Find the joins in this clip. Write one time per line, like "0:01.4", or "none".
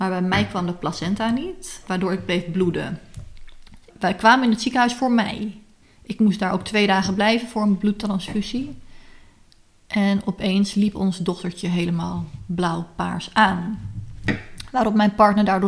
0:03.9